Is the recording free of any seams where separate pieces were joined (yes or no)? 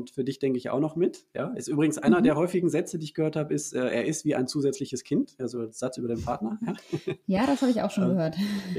yes